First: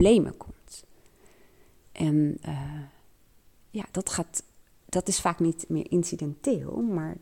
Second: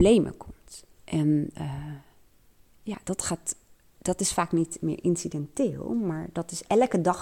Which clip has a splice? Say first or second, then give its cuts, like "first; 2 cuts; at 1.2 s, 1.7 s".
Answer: second; 1 cut; at 0.9 s